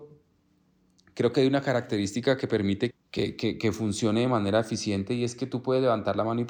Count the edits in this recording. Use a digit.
1